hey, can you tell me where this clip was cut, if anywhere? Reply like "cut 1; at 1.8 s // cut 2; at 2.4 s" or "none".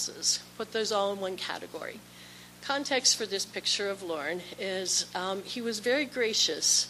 none